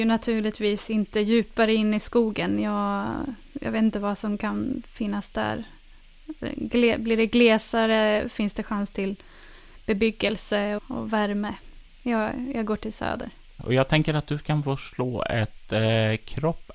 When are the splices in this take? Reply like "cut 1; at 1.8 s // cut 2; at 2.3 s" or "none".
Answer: cut 1; at 10.8 s